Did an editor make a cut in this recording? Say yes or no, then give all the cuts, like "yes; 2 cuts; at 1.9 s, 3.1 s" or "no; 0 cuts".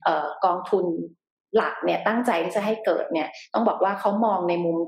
no; 0 cuts